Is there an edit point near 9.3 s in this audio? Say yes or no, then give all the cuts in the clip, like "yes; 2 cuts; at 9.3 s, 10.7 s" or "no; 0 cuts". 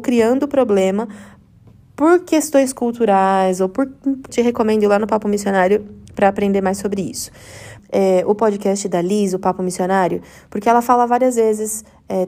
no; 2 cuts; at 4.3 s, 7.8 s